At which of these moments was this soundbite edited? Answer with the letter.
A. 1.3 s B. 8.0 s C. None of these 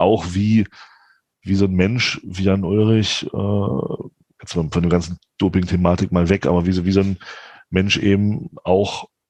C